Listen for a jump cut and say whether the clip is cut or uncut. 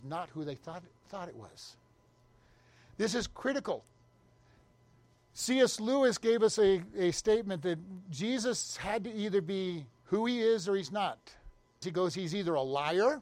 cut